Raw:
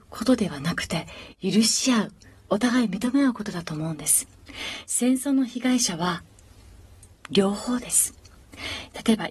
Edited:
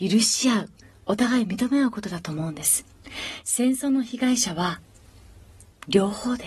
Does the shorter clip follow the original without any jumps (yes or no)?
yes